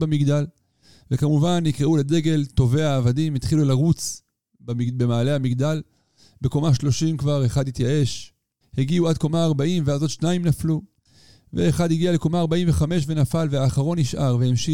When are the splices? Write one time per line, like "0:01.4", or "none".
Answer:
0:08.6